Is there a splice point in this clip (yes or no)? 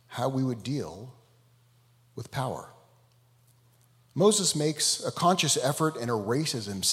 no